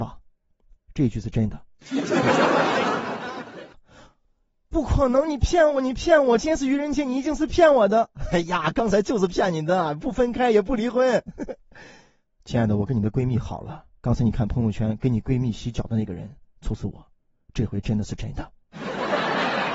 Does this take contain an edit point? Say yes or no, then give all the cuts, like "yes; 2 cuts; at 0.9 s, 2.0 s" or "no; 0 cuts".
no; 0 cuts